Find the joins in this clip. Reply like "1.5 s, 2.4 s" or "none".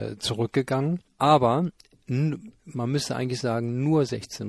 1.1 s